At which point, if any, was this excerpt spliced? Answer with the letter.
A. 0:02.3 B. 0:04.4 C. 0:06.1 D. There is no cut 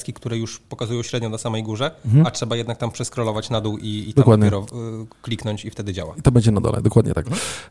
D